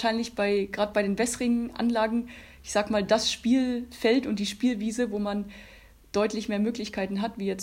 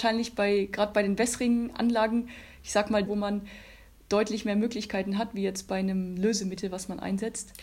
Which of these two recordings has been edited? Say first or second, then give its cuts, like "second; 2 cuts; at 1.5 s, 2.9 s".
second; 1 cut; at 3.1 s